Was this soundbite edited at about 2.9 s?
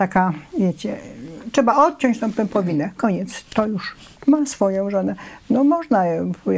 no; 1 cut; at 4.2 s

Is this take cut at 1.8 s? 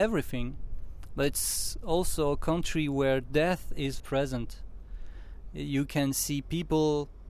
no; 1 cut; at 4.0 s

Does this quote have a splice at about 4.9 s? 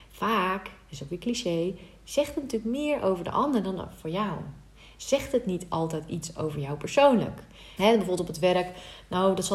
no; 1 cut; at 7.8 s

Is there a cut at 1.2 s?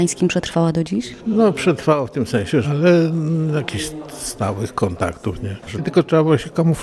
no; 2 cuts; at 2.6 s, 5.7 s

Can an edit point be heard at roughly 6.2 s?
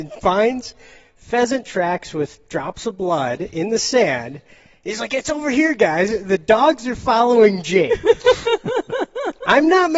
no; 0 cuts

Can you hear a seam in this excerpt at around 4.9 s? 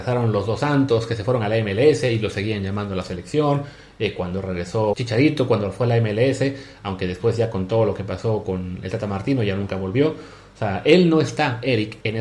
yes; 1 cut; at 4.9 s

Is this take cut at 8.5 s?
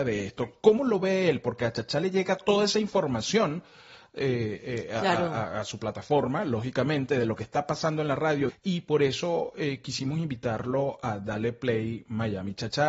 yes; 1 cut; at 8.5 s

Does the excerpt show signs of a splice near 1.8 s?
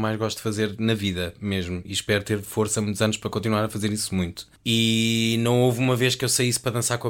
no; 1 cut; at 4.6 s

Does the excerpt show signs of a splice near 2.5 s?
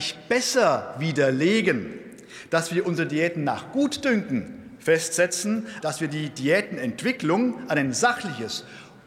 no; 1 cut; at 5.8 s

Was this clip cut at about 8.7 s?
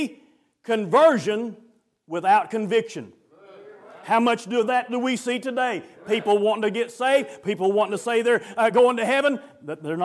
no; 0 cuts

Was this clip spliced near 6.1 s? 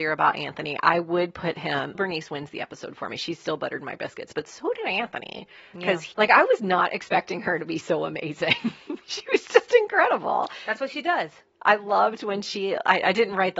yes; 2 cuts; at 1.9 s, 6.1 s

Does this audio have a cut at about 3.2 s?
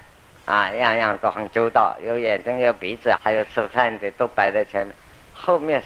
yes; 1 cut; at 3.2 s

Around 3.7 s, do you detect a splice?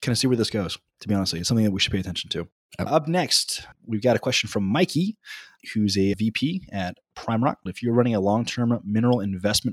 no; 1 cut; at 7.7 s

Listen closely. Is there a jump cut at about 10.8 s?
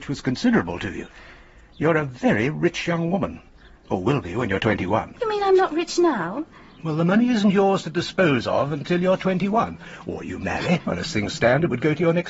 yes; 1 cut; at 10.8 s

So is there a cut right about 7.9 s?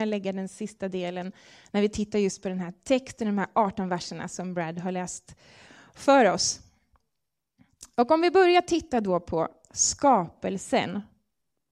no; 0 cuts

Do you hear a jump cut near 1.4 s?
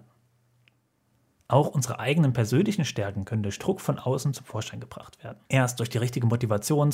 no; 1 cut; at 5.5 s

